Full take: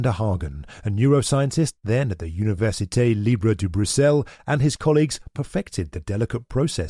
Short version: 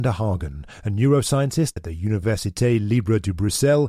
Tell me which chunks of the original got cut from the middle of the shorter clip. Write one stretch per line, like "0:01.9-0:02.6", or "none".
0:01.8-0:02.1